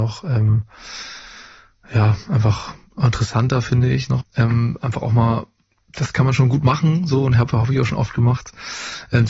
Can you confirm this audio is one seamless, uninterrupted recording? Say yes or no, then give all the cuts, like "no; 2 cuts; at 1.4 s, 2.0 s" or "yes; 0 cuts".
no; 1 cut; at 4.2 s